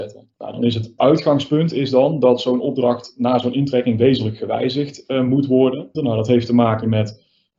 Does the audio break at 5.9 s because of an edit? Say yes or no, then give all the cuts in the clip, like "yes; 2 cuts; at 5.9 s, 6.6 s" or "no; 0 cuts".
yes; 2 cuts; at 1.0 s, 5.9 s